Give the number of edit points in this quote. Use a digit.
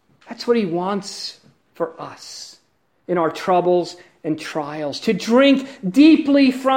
0